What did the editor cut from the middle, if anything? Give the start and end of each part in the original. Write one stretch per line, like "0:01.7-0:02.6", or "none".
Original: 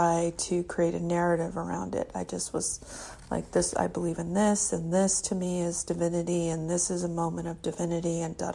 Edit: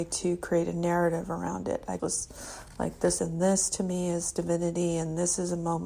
0:02.3-0:02.5
0:03.7-0:04.7

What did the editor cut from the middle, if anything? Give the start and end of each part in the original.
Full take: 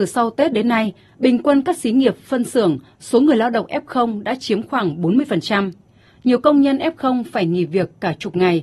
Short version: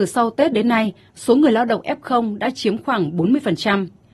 0:01.1-0:02.9

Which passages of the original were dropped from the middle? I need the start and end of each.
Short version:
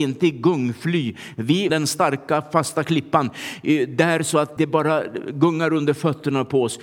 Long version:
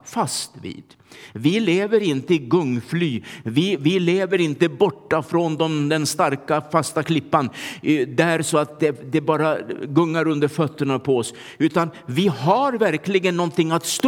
0:03.8-0:05.9
0:08.8-0:09.1

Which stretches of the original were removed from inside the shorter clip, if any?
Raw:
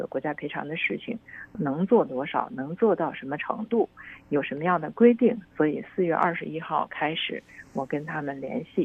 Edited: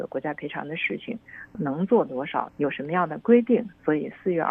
0:02.5-0:04.2

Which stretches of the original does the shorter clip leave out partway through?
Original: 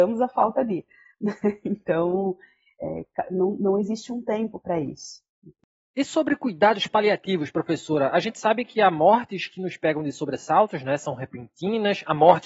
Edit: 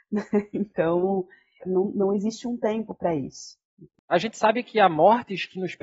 0:02.7-0:03.2
0:05.7-0:08.1

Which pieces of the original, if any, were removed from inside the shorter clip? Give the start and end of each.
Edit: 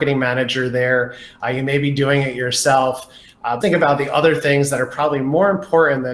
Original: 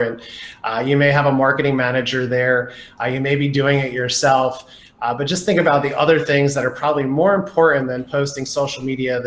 0:05.2-0:05.4

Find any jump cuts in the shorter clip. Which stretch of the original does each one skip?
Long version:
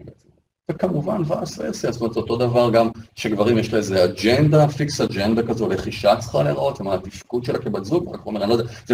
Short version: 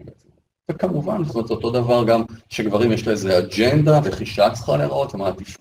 0:01.3-0:01.9
0:04.7-0:05.7

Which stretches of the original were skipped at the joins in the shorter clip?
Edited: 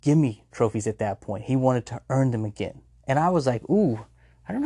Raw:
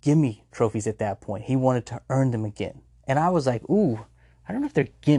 none

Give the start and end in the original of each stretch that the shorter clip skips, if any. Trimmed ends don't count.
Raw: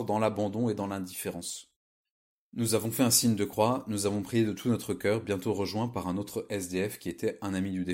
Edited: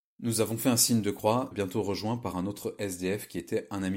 0:03.8-0:05.2

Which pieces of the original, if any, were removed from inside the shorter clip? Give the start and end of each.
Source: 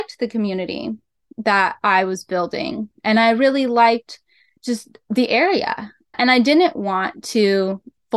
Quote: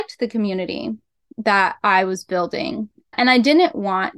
0:03.0-0:06.0

